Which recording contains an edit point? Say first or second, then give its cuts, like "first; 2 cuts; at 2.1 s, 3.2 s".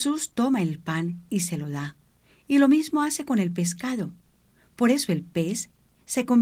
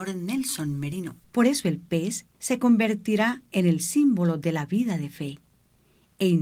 second; 2 cuts; at 1.2 s, 2.3 s